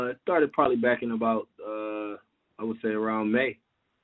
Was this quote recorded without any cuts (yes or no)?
yes